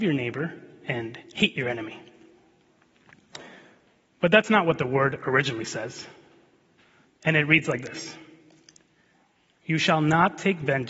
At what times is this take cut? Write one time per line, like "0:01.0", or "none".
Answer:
0:07.0